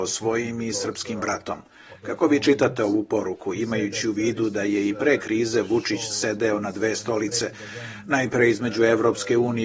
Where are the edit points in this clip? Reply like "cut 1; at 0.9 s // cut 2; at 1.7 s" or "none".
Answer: none